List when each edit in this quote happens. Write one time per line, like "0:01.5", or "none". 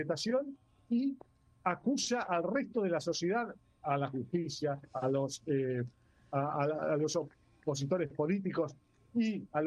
none